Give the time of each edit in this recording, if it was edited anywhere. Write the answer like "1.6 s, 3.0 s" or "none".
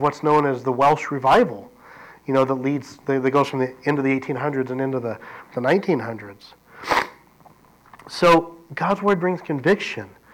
none